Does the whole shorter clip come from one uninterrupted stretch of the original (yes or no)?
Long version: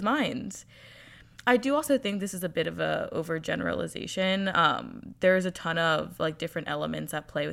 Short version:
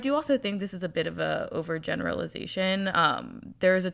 yes